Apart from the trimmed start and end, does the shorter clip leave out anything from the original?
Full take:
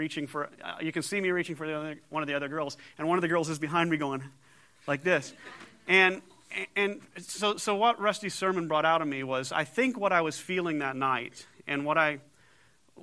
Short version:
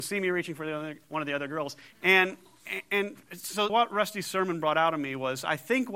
yes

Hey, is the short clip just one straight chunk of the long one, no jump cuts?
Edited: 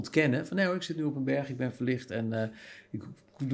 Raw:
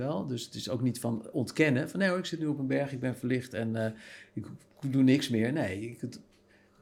yes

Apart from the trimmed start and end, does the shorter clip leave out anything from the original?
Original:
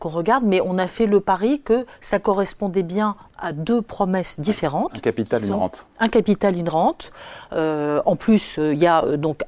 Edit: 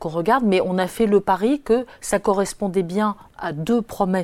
no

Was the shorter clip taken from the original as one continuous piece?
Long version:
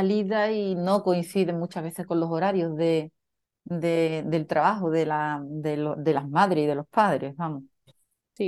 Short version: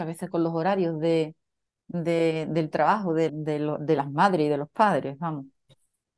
no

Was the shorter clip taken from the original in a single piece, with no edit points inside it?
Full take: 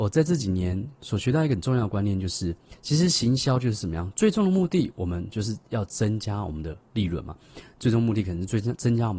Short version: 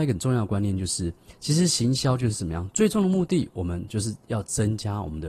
yes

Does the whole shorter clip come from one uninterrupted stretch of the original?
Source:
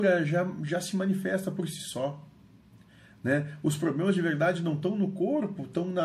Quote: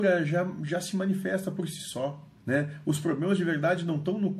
no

